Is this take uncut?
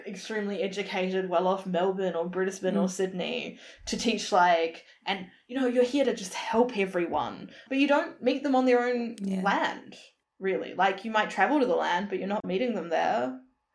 yes; 0 cuts

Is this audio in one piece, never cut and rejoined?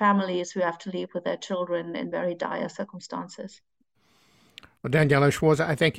yes; 0 cuts

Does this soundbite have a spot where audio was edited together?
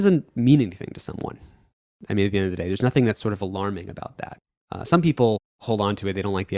no; 0 cuts

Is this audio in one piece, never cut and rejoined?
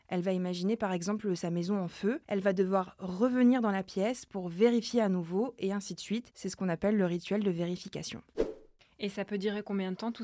no; 1 cut; at 2.2 s

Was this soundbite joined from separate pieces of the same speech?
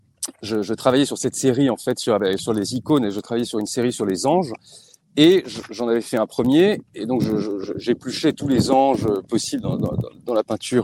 no; 0 cuts

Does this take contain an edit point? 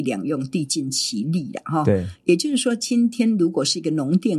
no; 0 cuts

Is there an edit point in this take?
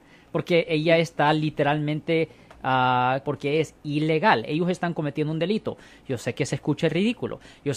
yes; 1 cut; at 3.2 s

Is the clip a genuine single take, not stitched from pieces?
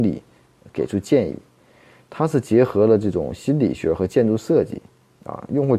yes; 0 cuts

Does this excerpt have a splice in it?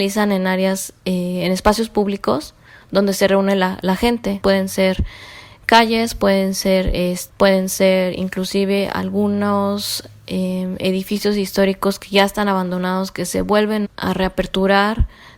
yes; 2 cuts; at 7.3 s, 13.8 s

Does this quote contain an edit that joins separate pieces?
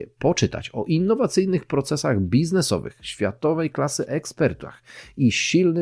no; 0 cuts

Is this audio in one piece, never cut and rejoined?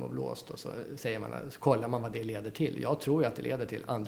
yes; 0 cuts

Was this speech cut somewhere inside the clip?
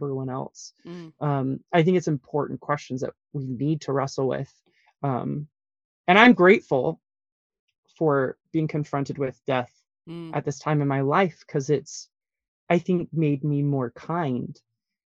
no; 0 cuts

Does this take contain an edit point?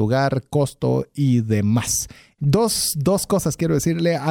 yes; 1 cut; at 2.4 s

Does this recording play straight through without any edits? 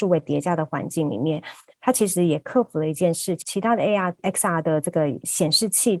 yes; 0 cuts

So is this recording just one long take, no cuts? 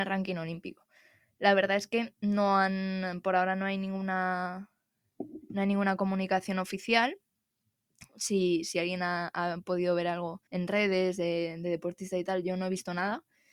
no; 1 cut; at 10.5 s

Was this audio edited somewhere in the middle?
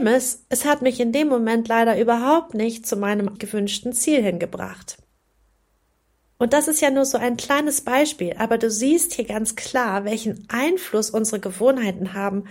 yes; 1 cut; at 3.4 s

